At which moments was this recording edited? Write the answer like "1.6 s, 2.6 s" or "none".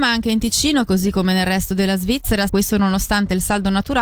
2.5 s